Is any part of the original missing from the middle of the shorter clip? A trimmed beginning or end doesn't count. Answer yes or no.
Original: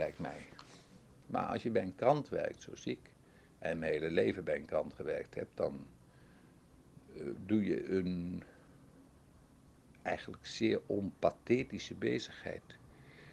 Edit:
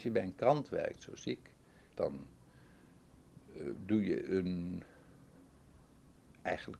yes